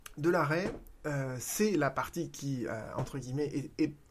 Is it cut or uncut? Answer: uncut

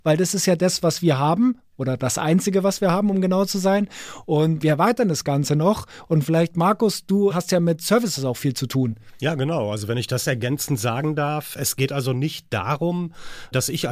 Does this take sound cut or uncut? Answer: uncut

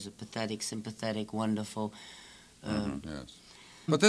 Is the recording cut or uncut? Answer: cut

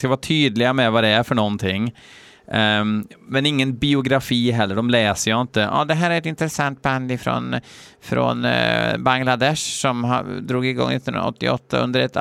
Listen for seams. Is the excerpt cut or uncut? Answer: uncut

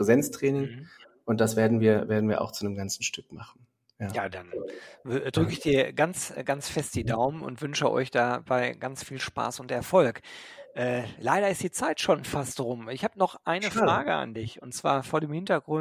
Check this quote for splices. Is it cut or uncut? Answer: uncut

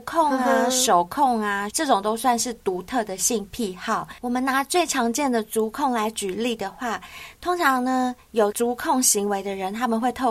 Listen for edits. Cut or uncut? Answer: cut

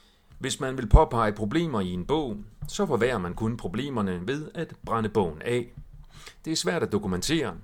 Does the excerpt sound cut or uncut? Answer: uncut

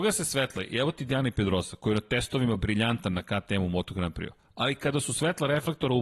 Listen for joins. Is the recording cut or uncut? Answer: uncut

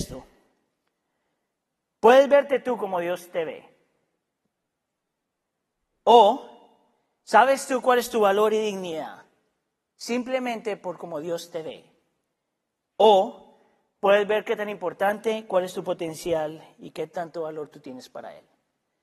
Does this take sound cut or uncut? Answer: uncut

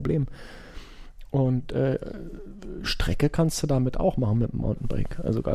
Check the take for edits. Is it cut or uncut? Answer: uncut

